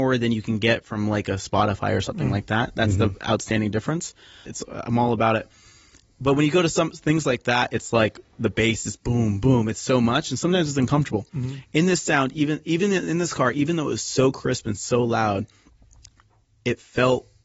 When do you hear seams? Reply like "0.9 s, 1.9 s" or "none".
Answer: 4.5 s